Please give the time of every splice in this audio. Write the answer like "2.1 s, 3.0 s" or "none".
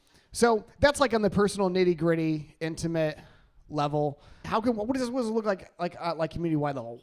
4.4 s